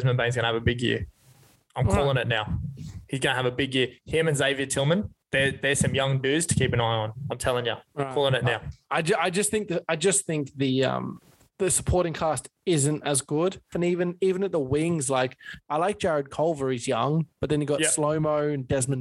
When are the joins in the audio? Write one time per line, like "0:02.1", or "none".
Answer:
0:05.2
0:13.7